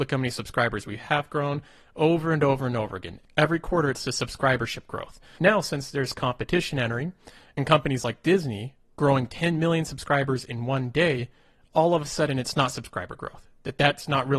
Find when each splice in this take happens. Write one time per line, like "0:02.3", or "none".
none